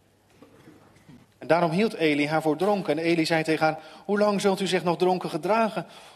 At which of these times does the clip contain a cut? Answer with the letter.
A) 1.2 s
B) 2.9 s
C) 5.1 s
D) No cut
A